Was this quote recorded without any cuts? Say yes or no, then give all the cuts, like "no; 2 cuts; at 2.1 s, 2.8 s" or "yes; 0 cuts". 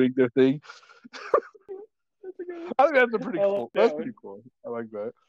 yes; 0 cuts